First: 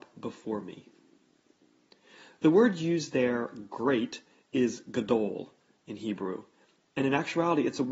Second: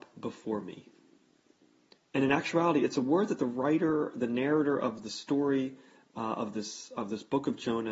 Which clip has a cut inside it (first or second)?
second